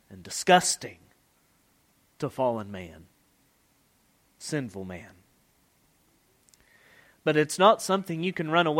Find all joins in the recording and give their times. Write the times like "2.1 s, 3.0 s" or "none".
none